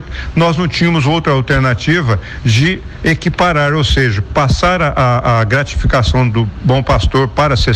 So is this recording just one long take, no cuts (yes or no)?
yes